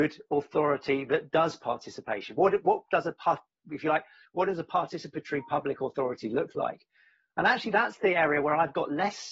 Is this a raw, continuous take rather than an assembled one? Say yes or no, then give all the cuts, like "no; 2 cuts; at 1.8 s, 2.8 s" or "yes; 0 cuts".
yes; 0 cuts